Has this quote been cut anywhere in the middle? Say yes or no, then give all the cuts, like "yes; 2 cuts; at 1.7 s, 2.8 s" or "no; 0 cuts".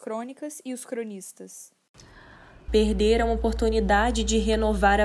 yes; 1 cut; at 2.7 s